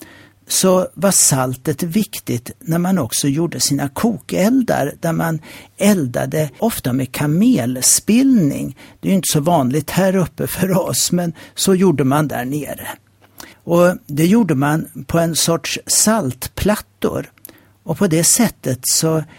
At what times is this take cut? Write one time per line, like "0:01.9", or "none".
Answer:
0:06.6
0:13.5